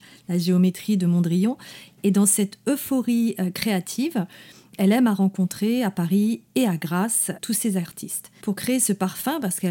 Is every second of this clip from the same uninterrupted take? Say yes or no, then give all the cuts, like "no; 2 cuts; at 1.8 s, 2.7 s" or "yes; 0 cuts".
yes; 0 cuts